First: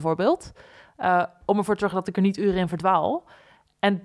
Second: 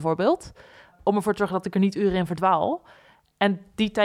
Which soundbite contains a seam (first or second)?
second